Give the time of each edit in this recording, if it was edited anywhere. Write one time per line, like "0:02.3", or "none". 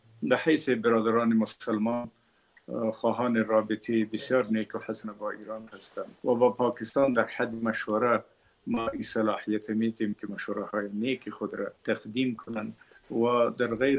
0:06.1
0:11.8